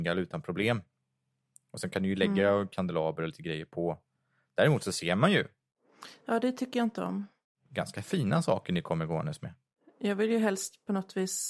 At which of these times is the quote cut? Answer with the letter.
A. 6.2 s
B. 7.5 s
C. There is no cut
C